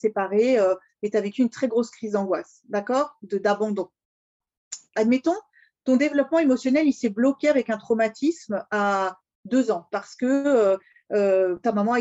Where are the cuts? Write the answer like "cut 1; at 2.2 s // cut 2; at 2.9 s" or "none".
cut 1; at 4.9 s